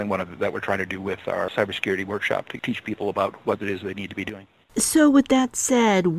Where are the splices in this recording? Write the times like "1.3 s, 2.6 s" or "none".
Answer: 1.5 s